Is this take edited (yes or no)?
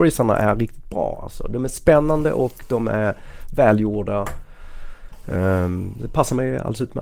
no